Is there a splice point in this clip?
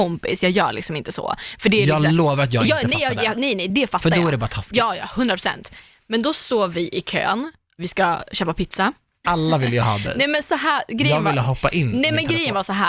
yes; 2 cuts; at 7.8 s, 9.2 s

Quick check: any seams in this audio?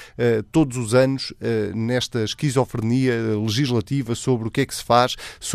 no; 0 cuts

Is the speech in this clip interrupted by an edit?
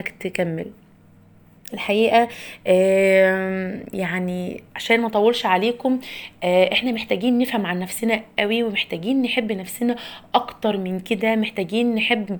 yes; 1 cut; at 4.7 s

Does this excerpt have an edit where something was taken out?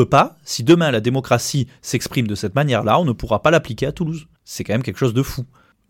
yes; 1 cut; at 4.4 s

